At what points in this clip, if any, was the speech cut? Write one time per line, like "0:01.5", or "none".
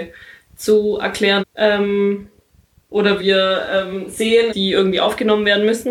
0:01.4
0:03.2
0:04.5